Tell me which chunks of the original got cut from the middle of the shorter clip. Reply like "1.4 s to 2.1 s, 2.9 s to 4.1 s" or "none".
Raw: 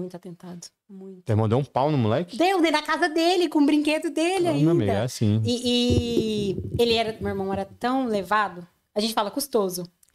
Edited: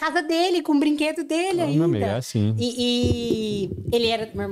none